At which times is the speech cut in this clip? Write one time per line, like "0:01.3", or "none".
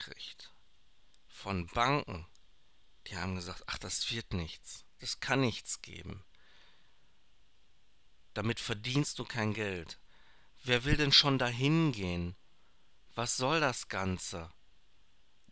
0:05.0
0:08.3